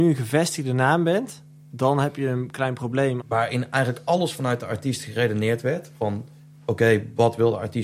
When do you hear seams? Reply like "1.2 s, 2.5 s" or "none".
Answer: 3.2 s